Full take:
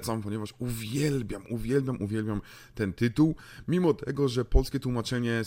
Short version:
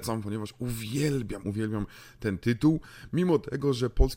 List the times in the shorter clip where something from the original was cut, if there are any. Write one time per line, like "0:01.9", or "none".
0:01.4